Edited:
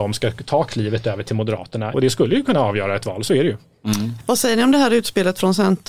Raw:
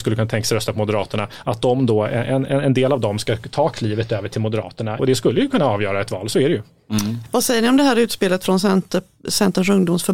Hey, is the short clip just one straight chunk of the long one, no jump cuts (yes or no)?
yes